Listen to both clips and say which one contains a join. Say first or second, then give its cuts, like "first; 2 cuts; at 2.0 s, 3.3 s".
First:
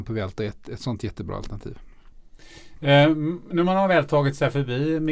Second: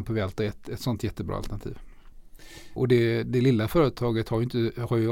second; 1 cut; at 2.8 s